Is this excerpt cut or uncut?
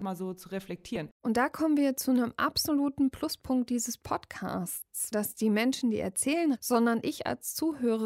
cut